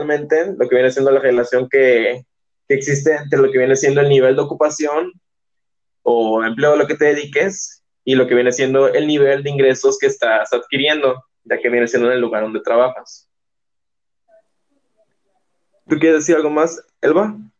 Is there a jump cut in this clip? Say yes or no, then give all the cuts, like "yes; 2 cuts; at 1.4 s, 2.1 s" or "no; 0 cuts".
no; 0 cuts